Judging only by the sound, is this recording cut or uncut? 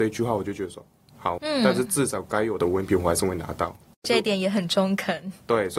cut